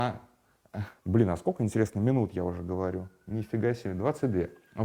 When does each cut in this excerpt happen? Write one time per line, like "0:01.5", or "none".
0:00.9